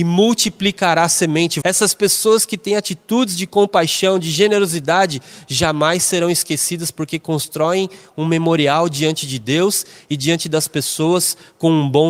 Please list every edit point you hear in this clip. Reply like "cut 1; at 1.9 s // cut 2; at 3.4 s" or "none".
cut 1; at 1.6 s